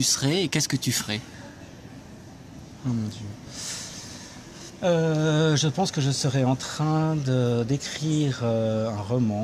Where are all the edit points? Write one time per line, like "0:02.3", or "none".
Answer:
none